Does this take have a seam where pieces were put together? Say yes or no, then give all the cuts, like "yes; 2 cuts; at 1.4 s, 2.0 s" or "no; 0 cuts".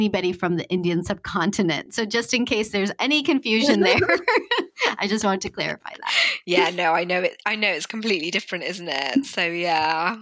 no; 0 cuts